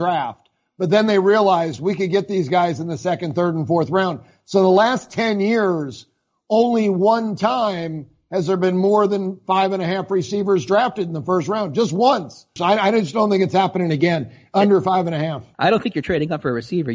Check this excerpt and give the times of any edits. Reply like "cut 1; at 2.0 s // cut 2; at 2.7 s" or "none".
cut 1; at 12.6 s // cut 2; at 15.5 s